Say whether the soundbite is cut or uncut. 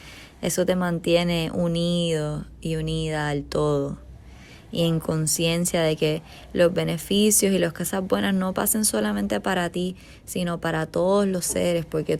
uncut